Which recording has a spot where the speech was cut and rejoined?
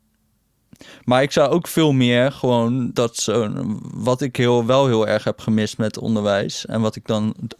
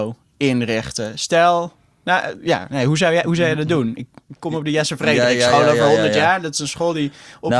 first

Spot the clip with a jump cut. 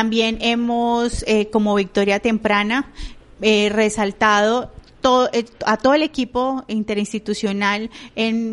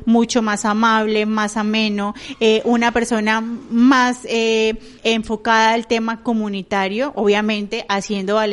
second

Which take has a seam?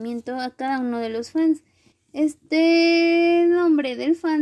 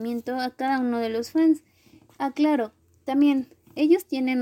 first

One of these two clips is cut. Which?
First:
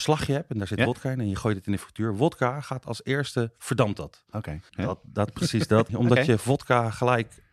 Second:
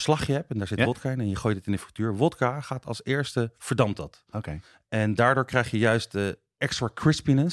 first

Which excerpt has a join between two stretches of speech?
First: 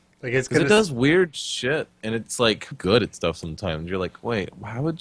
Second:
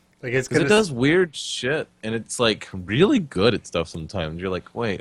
first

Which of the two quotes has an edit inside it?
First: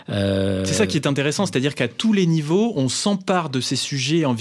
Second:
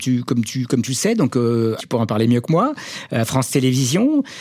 second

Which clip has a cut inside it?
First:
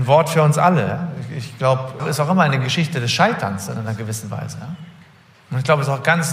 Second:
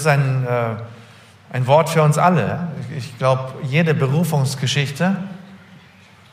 first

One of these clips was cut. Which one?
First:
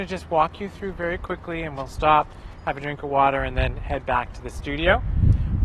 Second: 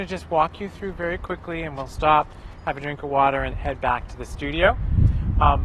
second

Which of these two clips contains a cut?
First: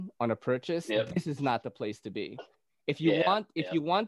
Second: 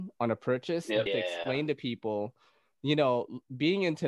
second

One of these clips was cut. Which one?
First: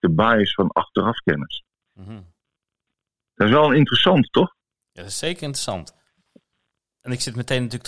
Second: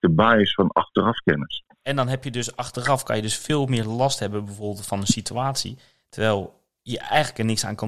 second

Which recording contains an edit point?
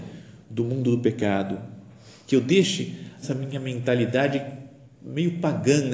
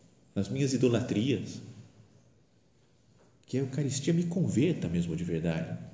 first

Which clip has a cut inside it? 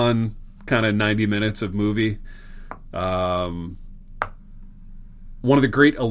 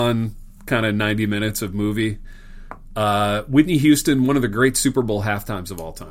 first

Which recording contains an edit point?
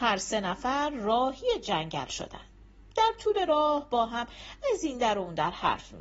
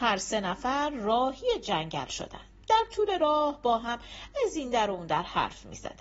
second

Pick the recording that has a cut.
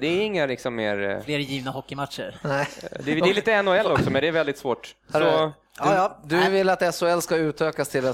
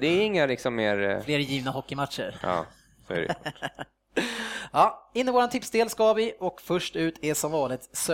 second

